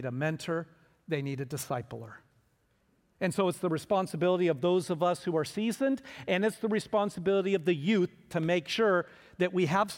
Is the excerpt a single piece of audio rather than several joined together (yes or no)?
yes